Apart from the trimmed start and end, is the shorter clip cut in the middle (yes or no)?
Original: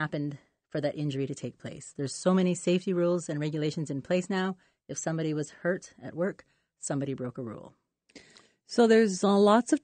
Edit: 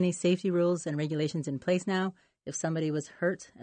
no